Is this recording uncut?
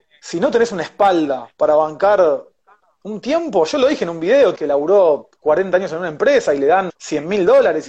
no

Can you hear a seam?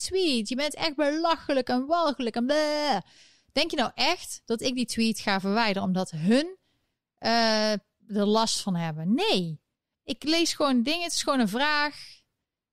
no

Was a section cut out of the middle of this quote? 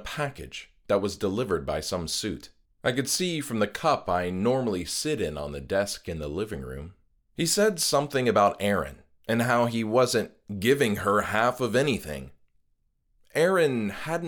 yes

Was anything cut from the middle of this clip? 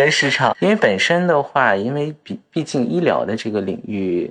no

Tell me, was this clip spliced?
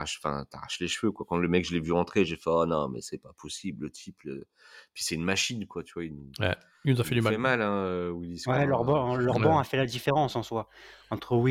no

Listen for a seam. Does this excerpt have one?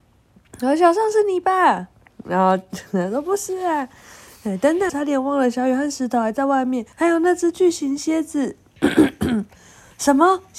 yes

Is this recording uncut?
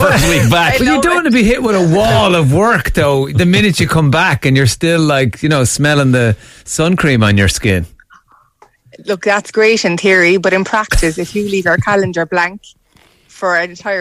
yes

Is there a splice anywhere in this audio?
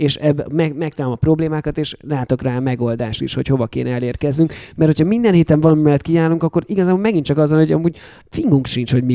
no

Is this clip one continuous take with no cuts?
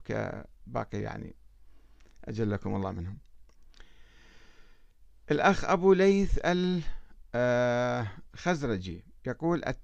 yes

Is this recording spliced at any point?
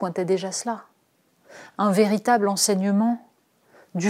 no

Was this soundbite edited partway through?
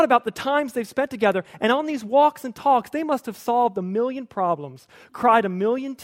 no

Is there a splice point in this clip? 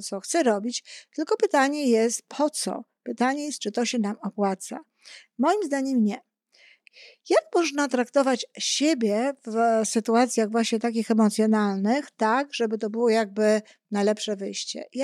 no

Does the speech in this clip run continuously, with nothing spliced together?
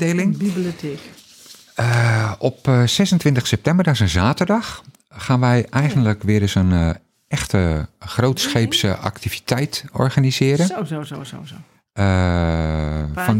yes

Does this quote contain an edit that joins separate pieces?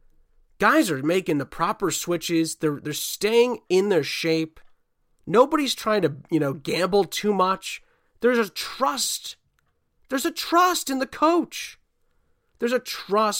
no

